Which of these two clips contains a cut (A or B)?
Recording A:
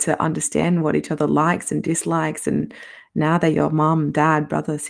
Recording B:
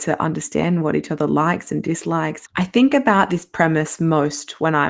B